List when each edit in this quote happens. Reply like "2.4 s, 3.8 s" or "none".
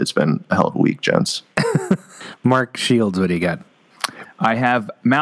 4.2 s